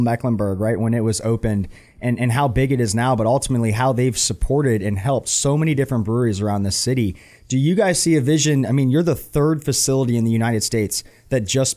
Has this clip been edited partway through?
no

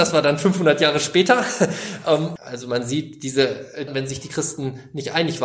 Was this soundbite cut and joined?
yes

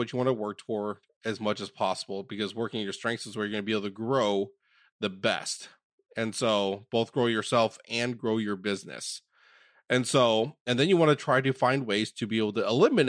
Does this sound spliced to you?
no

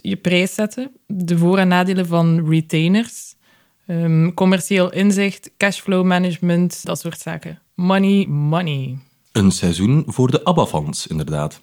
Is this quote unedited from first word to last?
no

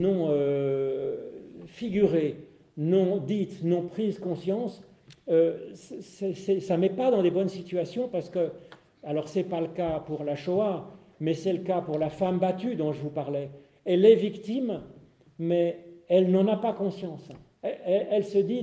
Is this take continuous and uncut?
no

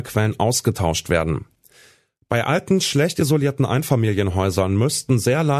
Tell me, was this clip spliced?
no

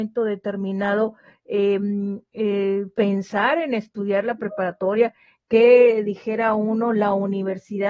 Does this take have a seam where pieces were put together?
no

